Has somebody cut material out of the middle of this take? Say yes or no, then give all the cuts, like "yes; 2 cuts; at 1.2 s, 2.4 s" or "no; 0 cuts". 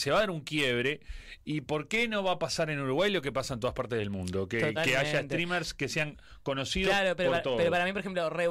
no; 0 cuts